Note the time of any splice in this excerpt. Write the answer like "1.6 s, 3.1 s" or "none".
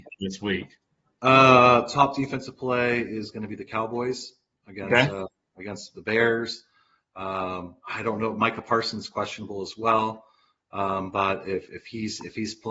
none